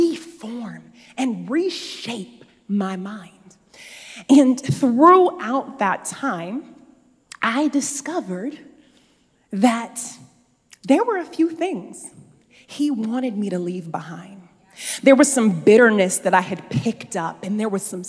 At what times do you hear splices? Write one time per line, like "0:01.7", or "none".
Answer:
none